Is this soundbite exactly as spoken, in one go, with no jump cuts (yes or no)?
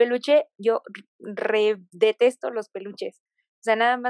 yes